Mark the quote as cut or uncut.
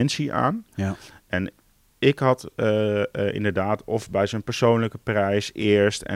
uncut